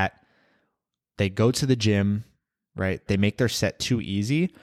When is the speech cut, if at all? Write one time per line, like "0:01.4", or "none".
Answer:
0:03.1